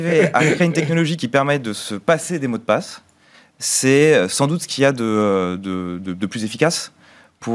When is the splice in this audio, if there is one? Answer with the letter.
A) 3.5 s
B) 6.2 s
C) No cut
C